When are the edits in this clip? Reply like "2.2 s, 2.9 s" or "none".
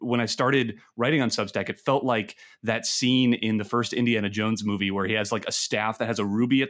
none